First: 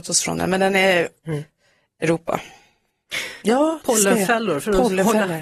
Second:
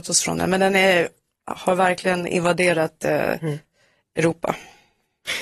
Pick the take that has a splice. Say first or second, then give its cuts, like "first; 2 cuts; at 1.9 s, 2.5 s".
first; 2 cuts; at 1.2 s, 3.4 s